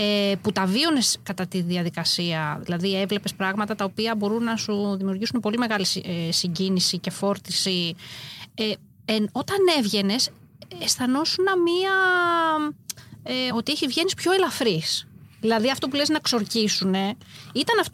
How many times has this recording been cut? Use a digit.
1